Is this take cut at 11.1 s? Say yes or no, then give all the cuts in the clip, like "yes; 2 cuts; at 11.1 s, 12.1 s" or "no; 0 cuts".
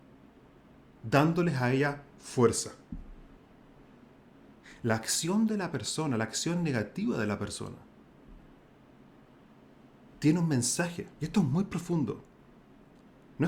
yes; 1 cut; at 11.1 s